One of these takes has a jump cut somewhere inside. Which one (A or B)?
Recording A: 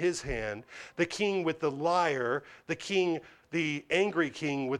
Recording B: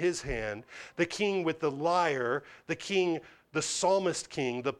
A